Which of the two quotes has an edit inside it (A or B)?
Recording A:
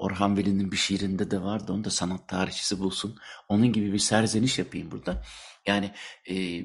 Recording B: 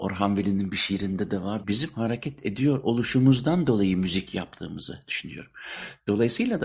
B